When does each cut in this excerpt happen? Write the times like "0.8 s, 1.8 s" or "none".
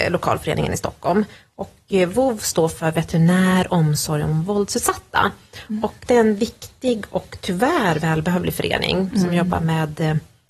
none